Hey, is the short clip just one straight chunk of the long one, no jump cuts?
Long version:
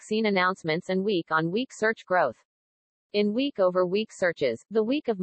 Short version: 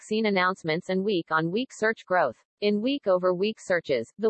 no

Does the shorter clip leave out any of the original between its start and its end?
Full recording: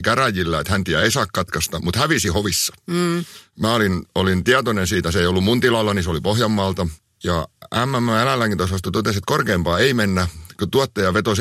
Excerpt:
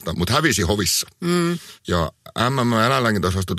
yes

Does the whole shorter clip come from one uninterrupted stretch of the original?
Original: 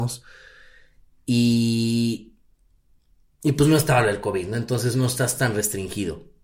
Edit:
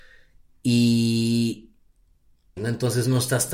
no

